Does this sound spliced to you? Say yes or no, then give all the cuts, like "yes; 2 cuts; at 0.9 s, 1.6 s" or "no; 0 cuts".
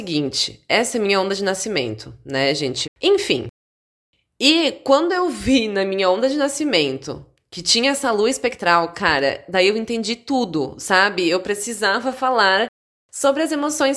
yes; 1 cut; at 2.8 s